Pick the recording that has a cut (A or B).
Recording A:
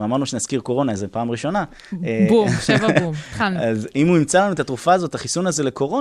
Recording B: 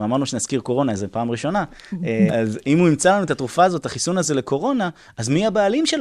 B